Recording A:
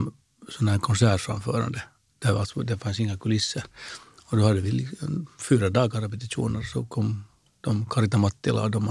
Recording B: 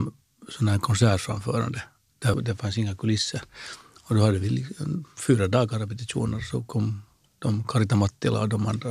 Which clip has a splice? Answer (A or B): B